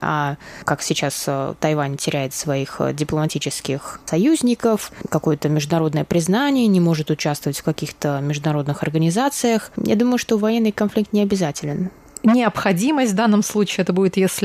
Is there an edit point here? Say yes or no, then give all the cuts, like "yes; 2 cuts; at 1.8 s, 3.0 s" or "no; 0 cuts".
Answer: no; 0 cuts